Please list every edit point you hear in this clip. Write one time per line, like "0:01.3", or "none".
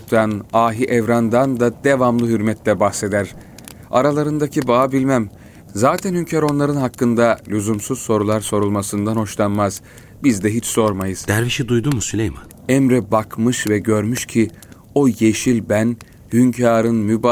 0:12.5

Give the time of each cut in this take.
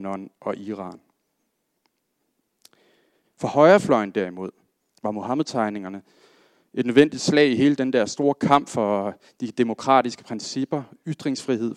0:03.2

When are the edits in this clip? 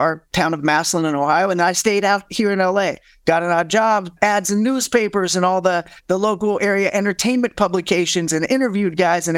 0:04.2

